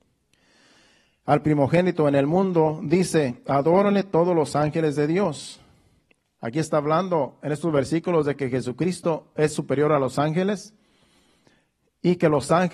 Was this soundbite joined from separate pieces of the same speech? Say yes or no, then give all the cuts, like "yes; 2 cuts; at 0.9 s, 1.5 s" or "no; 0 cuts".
no; 0 cuts